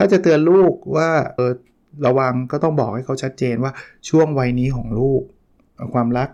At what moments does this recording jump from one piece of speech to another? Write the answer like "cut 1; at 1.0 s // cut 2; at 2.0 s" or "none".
cut 1; at 1.4 s